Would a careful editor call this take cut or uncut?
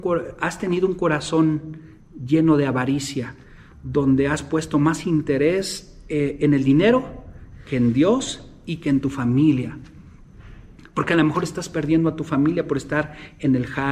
uncut